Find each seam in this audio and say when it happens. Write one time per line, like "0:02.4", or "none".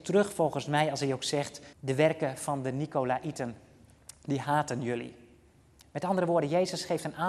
0:01.7